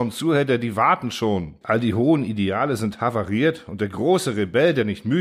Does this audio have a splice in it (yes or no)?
yes